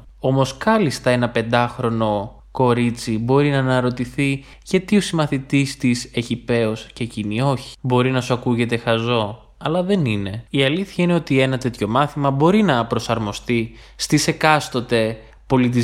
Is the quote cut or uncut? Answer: cut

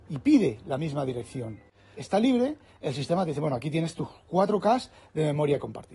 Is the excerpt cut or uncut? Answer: cut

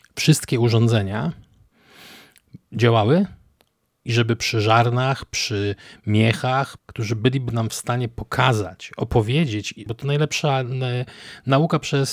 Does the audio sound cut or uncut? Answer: cut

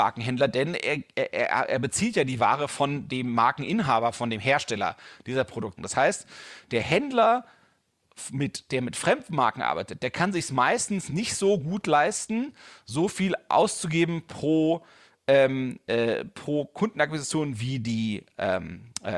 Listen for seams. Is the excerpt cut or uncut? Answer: cut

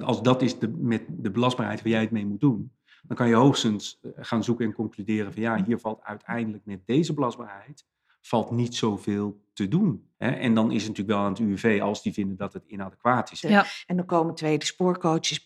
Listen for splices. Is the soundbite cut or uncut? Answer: cut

